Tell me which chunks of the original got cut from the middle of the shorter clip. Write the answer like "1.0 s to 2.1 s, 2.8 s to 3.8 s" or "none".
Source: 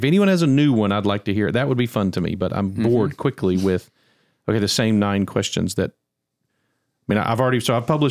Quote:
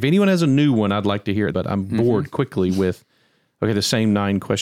1.5 s to 2.4 s